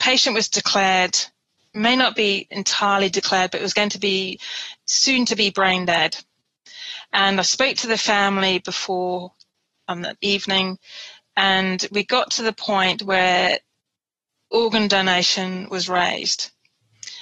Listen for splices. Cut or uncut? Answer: uncut